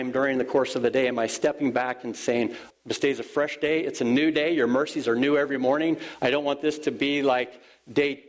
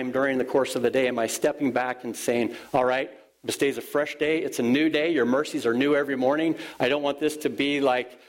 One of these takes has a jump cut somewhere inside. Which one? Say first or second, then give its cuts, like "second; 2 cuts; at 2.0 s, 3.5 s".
first; 1 cut; at 2.7 s